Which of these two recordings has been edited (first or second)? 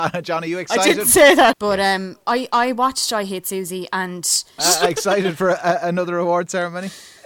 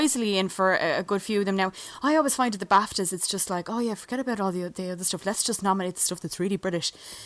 first